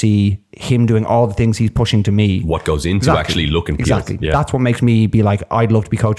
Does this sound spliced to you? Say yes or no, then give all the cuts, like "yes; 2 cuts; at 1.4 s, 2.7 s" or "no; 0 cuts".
no; 0 cuts